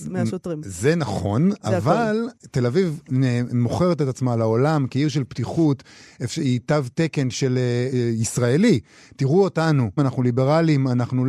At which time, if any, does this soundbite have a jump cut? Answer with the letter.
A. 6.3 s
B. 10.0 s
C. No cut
B